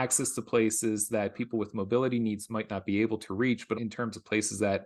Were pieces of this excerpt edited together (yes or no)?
yes